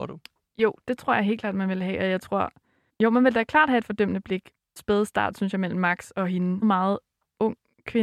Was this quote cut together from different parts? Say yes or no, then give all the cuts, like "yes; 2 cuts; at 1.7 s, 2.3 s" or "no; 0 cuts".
yes; 3 cuts; at 2.9 s, 4.8 s, 6.6 s